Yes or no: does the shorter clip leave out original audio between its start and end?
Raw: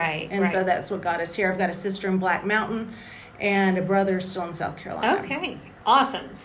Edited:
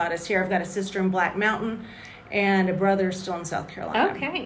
no